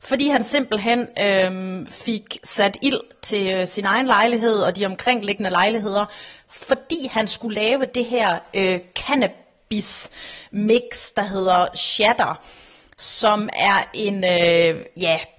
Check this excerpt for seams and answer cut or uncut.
uncut